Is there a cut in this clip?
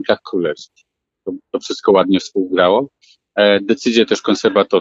no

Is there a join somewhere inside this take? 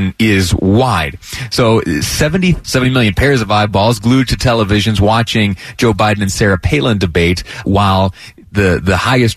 yes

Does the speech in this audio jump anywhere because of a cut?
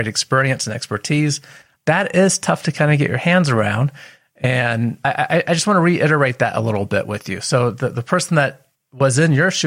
no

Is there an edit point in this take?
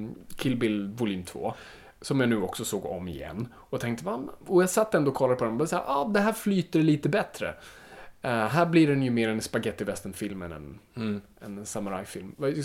no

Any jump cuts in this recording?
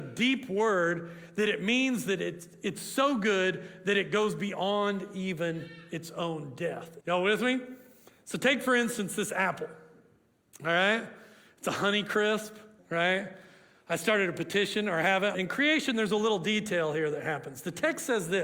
yes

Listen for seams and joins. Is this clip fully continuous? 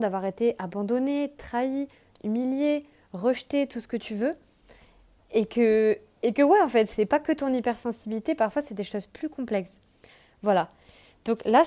yes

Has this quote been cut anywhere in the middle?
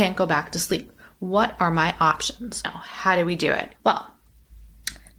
yes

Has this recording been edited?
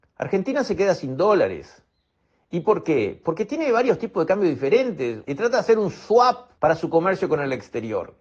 yes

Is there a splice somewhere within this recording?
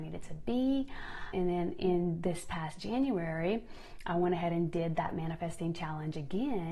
yes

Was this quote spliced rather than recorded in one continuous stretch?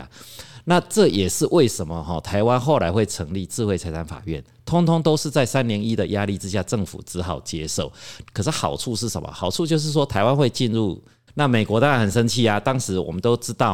yes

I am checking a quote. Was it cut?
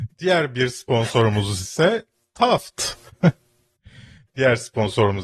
yes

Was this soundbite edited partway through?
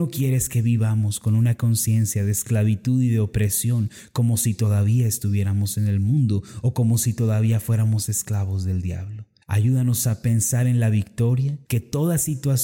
yes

